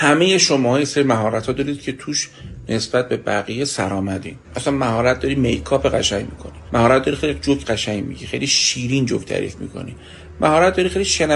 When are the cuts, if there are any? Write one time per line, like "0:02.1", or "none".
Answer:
0:04.4